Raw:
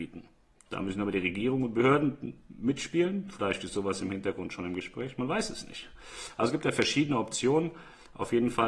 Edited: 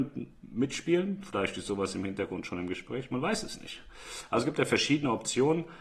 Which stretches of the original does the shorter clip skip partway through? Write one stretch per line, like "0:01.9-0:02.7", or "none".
none

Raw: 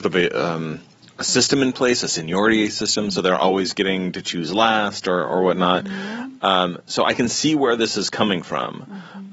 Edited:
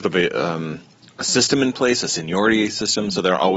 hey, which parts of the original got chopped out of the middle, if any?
none

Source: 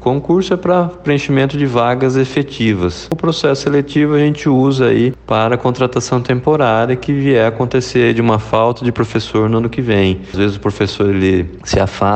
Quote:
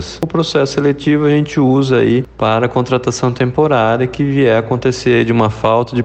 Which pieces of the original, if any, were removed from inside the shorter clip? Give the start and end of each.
none

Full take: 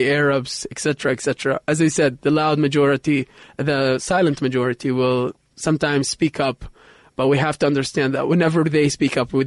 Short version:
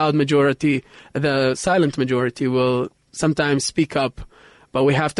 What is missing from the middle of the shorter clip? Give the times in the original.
none

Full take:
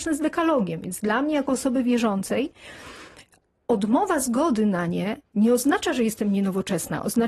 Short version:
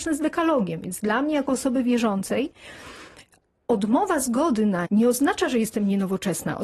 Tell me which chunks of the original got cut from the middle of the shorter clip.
0:04.8-0:05.3

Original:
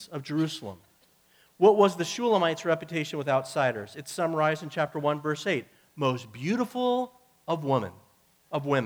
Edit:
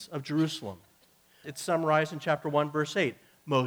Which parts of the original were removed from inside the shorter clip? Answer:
0:01.4-0:03.9

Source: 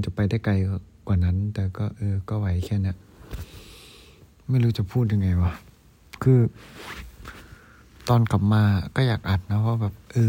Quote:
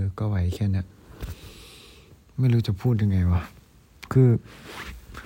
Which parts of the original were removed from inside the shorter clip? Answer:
none

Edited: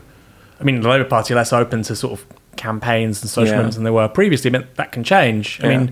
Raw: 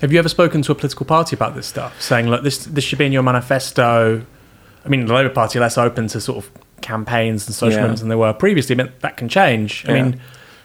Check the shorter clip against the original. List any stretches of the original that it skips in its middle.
none

